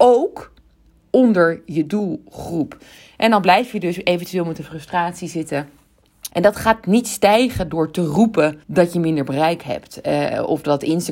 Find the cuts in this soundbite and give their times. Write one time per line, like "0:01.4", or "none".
0:06.3
0:08.6